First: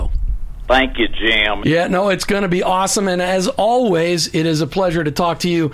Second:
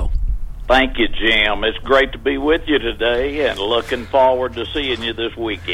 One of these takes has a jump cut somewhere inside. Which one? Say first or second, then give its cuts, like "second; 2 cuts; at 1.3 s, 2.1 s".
first; 1 cut; at 1.6 s